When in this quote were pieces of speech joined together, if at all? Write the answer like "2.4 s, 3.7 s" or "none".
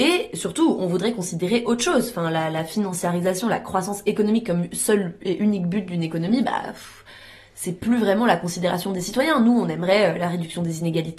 none